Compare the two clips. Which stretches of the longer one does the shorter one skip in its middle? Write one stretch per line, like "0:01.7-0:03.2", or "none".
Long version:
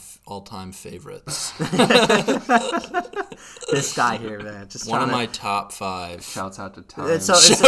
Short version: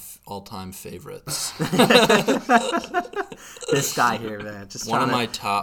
none

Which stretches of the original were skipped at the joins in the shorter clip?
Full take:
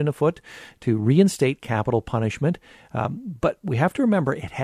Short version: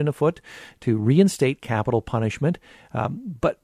none

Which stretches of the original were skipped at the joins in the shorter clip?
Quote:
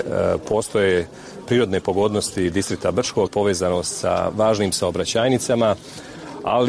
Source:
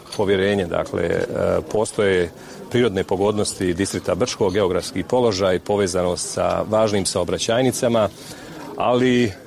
0:04.5-0:05.6

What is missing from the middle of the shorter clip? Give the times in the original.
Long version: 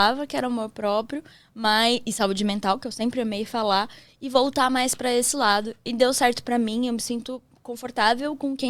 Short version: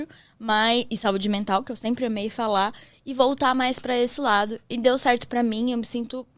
none

